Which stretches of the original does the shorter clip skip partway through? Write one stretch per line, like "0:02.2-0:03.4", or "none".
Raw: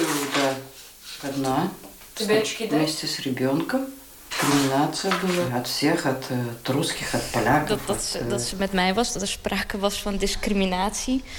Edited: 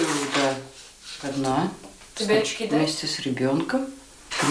none

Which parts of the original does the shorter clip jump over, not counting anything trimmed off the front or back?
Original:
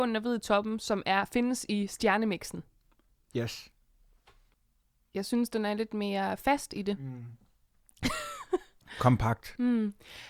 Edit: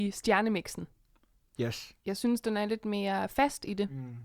0:03.8-0:05.1

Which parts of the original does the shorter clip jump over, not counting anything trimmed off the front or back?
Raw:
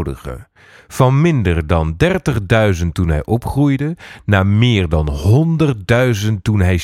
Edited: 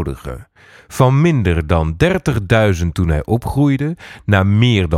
none

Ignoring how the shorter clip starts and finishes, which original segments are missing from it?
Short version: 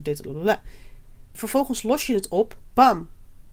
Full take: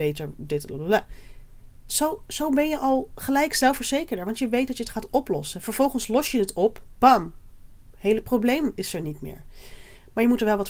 0:01.8-0:05.6

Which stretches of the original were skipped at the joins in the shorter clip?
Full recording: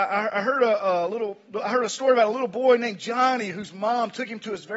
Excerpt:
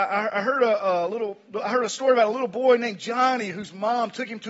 none

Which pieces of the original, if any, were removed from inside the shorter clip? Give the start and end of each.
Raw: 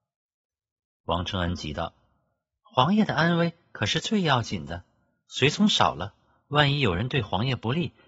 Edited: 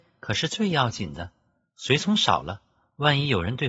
none

